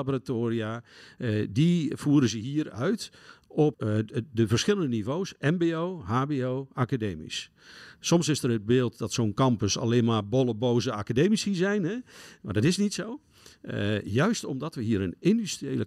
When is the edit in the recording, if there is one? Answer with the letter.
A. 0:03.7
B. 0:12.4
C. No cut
A